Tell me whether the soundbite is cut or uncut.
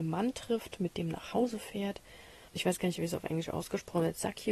cut